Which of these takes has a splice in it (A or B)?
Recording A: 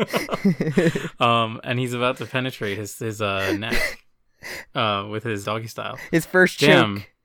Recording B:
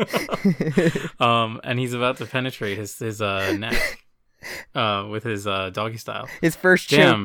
A